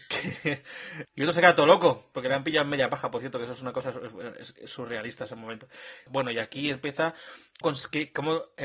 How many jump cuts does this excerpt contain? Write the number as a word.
three